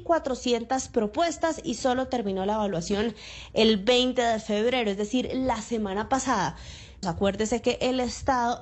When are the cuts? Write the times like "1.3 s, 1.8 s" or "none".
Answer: 7.0 s